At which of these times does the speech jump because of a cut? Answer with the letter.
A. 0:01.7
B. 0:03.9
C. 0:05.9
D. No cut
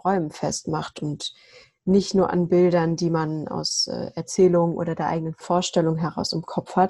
D